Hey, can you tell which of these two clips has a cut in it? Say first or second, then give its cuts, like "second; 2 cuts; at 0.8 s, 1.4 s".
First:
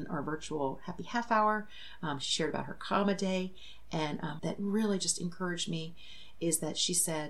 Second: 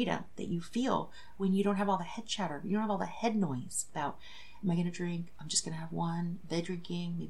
first; 1 cut; at 4.4 s